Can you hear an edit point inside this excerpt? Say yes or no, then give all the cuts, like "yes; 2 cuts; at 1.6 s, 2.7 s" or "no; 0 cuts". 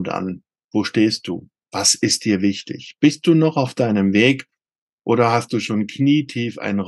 no; 0 cuts